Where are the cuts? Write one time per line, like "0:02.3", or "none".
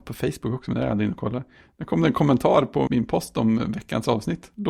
0:02.9

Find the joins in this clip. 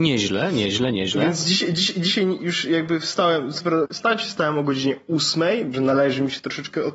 0:03.9
0:05.7

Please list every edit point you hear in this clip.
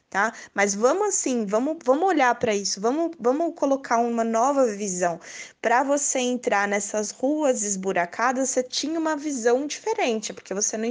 none

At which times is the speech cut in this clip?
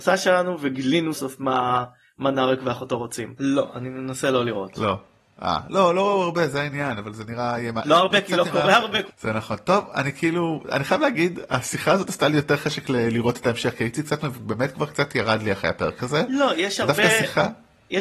0:01.1
0:03.4
0:09.1

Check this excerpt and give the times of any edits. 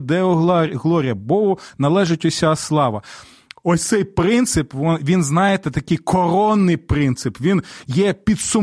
none

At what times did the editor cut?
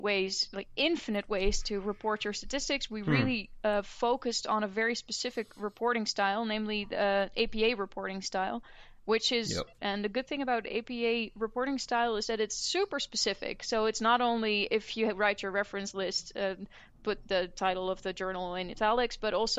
0:09.8

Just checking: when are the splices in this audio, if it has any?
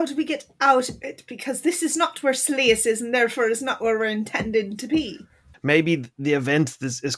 0:05.5

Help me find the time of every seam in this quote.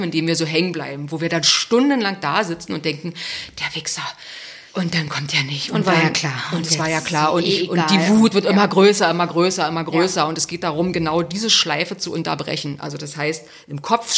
0:04.7

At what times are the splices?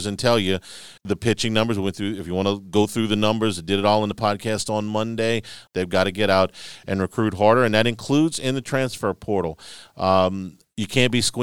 0:01.0
0:05.7

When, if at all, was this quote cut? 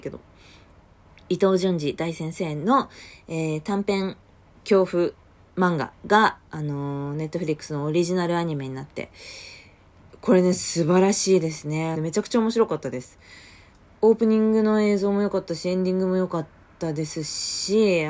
0:11.9

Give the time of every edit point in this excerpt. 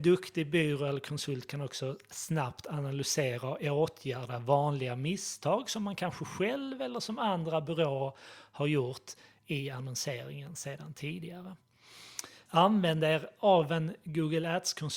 0:12.5

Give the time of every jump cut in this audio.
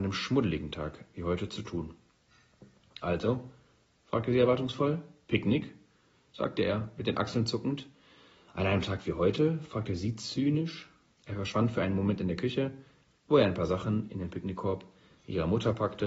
0:11.1

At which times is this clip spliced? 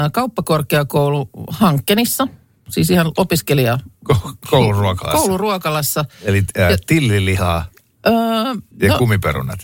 0:08.7

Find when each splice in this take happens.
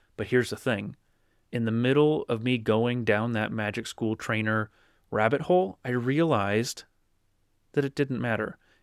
none

